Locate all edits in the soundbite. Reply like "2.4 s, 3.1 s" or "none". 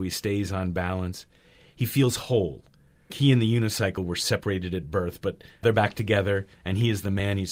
3.1 s, 5.6 s